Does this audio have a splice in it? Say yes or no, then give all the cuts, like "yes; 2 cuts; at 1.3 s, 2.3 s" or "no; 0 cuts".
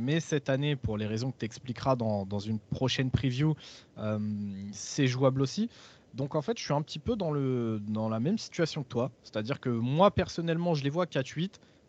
no; 0 cuts